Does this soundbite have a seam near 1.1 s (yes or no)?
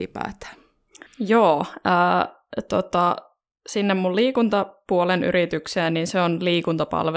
yes